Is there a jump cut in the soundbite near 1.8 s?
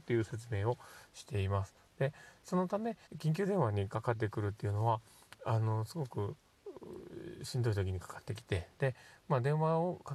no; 1 cut; at 3.1 s

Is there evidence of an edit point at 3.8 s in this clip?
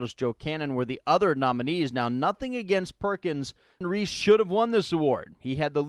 yes; 1 cut; at 3.8 s

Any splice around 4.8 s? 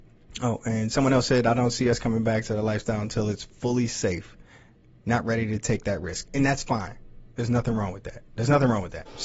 no; 0 cuts

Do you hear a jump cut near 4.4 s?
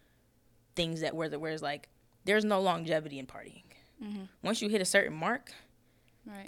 no; 0 cuts

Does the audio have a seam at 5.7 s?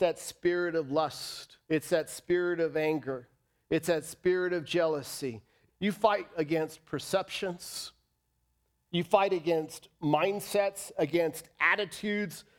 yes; 3 cuts; at 1.6 s, 5.7 s, 8.9 s

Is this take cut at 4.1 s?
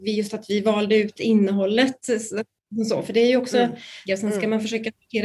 yes; 1 cut; at 4.1 s

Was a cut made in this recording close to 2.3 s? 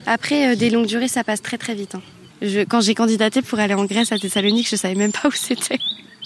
yes; 1 cut; at 2.3 s

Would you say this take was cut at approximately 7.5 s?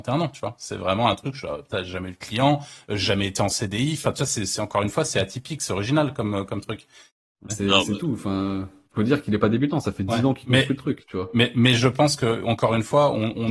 yes; 1 cut; at 7.5 s

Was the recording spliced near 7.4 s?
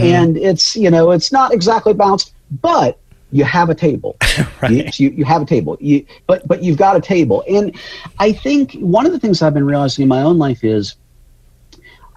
no; 2 cuts; at 4.9 s, 6.2 s

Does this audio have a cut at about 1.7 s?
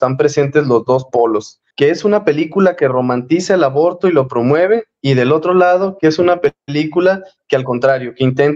yes; 1 cut; at 1.7 s

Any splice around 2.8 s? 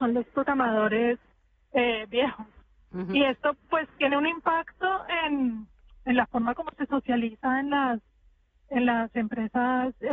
no; 0 cuts

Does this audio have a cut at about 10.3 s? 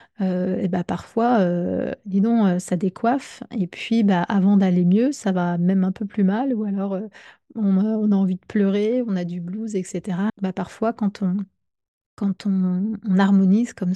yes; 1 cut; at 10.3 s

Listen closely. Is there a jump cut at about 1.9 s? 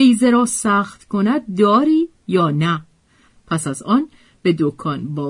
no; 1 cut; at 3.3 s

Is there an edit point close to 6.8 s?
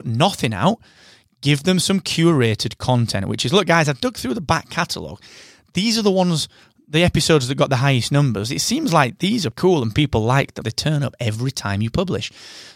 no; 2 cuts; at 9.5 s, 10.6 s

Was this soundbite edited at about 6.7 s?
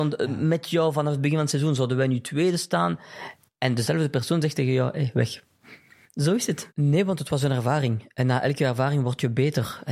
yes; 1 cut; at 6.7 s

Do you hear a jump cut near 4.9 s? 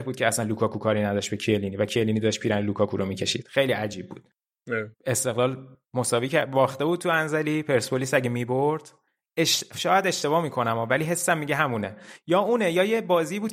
yes; 1 cut; at 4.9 s

